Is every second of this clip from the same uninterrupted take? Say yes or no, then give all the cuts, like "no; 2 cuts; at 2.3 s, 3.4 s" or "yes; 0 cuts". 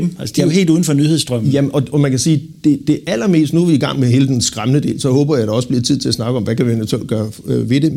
yes; 0 cuts